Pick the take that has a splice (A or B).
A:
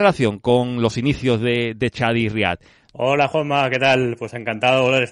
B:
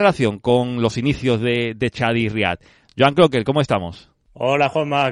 A